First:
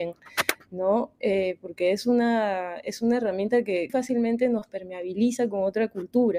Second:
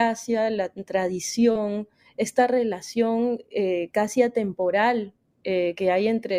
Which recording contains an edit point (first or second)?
first